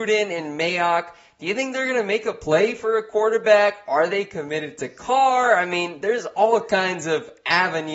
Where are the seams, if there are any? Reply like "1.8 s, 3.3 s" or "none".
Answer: none